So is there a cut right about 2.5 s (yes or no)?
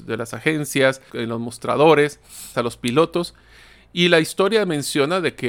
yes